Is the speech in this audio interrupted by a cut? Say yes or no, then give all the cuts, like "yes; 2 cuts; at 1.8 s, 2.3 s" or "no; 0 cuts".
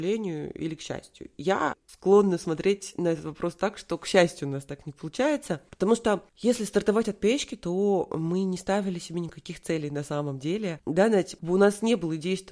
no; 0 cuts